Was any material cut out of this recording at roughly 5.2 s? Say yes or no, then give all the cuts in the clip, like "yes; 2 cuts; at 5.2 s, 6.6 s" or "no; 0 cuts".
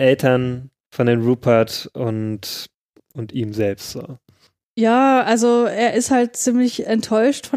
no; 0 cuts